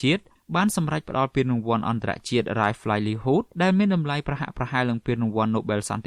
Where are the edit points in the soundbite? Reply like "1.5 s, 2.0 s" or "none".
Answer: 3.5 s